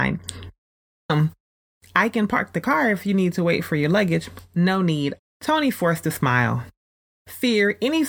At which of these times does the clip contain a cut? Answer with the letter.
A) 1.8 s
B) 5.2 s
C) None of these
B